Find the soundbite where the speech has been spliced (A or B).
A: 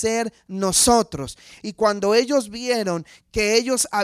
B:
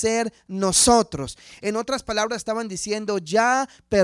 A